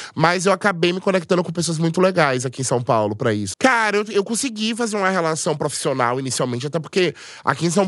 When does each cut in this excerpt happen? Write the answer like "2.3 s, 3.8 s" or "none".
3.5 s